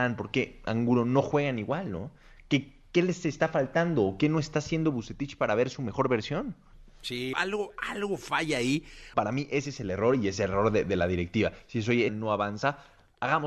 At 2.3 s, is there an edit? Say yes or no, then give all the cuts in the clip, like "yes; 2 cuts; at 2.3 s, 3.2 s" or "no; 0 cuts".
no; 3 cuts; at 7.3 s, 9.1 s, 12.1 s